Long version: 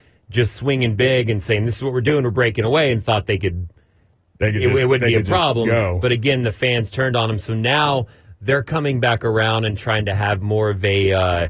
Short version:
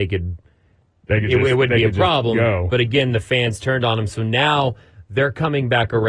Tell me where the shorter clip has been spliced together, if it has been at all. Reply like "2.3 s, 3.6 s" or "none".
none